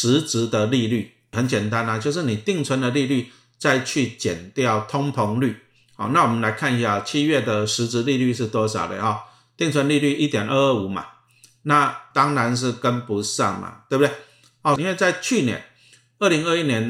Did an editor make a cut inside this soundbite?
yes; 3 cuts; at 1.3 s, 12.1 s, 14.8 s

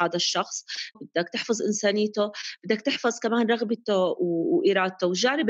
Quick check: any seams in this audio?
yes; 1 cut; at 0.9 s

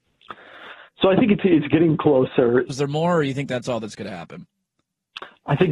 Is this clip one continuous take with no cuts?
no; 1 cut; at 2.7 s

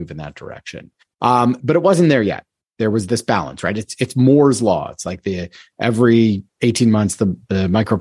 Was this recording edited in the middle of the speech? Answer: yes; 1 cut; at 3.7 s

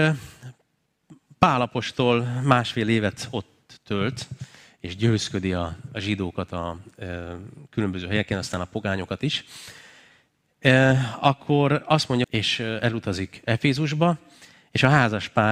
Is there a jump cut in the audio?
yes; 1 cut; at 12.2 s

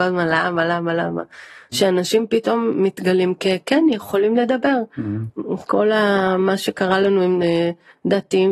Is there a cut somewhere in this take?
yes; 1 cut; at 1.7 s

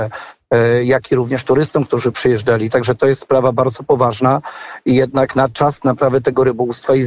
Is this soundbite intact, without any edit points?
yes; 0 cuts

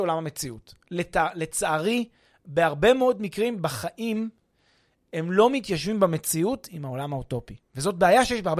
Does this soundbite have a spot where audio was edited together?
no; 0 cuts

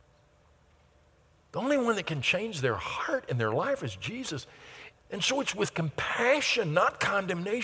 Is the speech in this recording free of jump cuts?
no; 1 cut; at 4.9 s

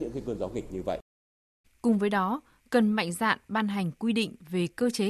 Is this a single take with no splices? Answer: no; 1 cut; at 1.6 s

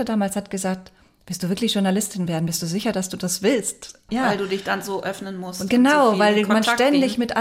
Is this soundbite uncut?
yes; 0 cuts

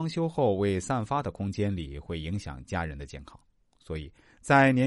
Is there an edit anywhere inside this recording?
yes; 1 cut; at 3.7 s

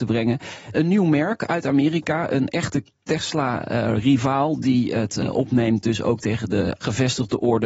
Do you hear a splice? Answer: no; 0 cuts

